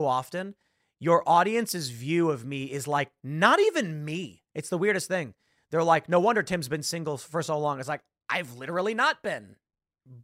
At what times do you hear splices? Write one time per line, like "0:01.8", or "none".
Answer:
0:04.5